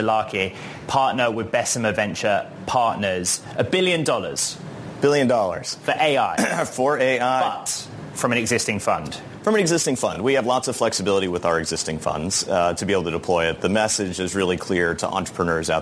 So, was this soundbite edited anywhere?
no; 0 cuts

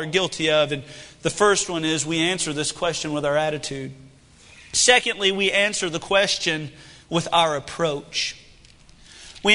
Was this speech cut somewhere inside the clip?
no; 0 cuts

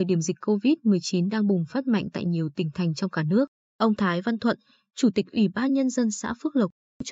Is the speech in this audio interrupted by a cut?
no; 0 cuts

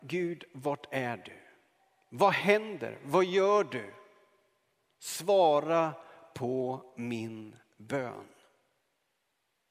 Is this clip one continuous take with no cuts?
yes; 0 cuts

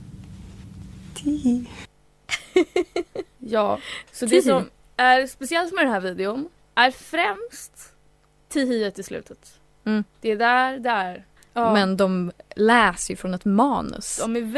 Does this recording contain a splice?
yes; 1 cut; at 11.4 s

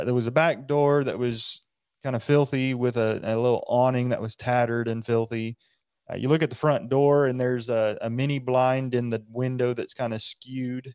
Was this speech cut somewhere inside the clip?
no; 0 cuts

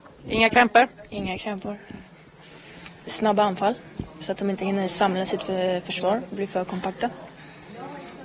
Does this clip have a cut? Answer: yes; 1 cut; at 3.1 s

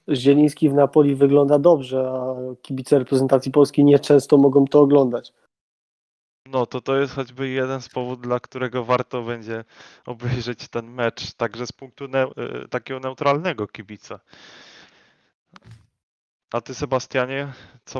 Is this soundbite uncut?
yes; 0 cuts

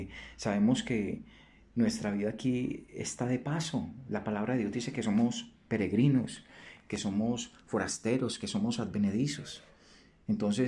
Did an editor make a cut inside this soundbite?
no; 0 cuts

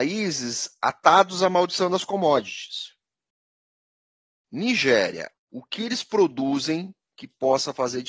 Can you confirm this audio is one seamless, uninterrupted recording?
no; 1 cut; at 5.3 s

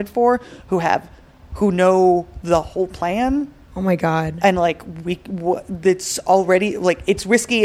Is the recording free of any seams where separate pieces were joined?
yes; 0 cuts

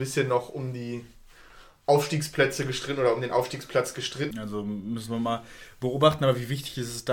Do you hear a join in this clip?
yes; 1 cut; at 4.3 s

